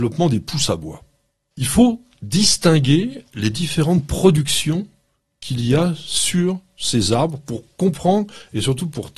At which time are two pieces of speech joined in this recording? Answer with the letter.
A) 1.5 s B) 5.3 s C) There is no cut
A